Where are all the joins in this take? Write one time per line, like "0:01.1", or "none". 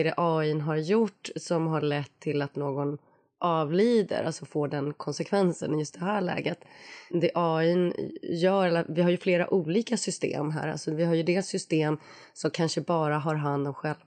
none